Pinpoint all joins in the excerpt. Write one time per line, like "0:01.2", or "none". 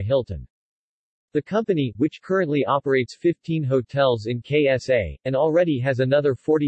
0:01.1